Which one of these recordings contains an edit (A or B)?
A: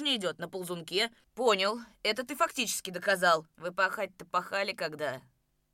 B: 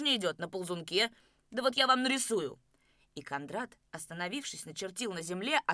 A